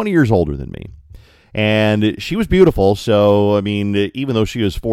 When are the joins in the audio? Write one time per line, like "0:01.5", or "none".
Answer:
none